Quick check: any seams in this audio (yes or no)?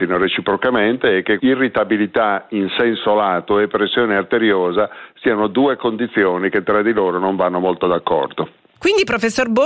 yes